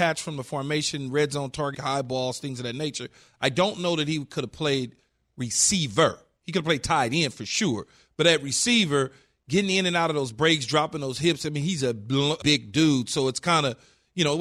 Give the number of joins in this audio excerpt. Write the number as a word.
two